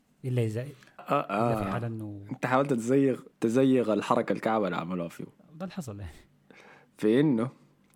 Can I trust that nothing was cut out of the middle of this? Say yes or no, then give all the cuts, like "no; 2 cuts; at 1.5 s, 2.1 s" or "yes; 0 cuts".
no; 2 cuts; at 1.0 s, 3.3 s